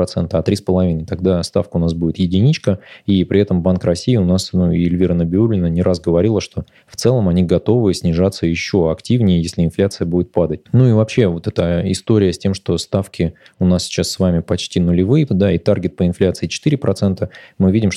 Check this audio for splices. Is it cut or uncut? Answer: cut